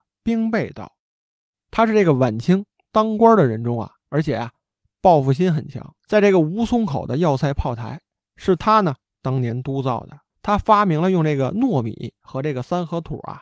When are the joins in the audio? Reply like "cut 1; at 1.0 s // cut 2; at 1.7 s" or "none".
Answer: cut 1; at 4.0 s // cut 2; at 6.0 s // cut 3; at 10.3 s